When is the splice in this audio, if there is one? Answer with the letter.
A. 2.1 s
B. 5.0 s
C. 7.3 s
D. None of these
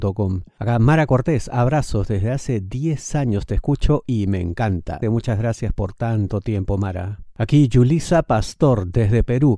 B